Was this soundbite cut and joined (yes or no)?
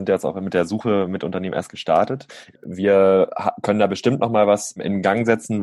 yes